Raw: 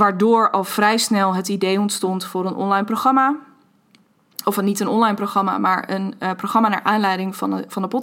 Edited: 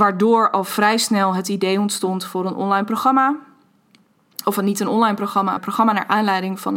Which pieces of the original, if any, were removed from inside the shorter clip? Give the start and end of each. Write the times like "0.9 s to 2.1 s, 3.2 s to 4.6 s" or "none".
5.6 s to 6.3 s